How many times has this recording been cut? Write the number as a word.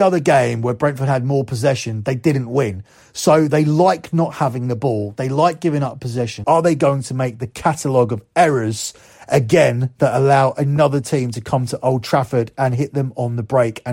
two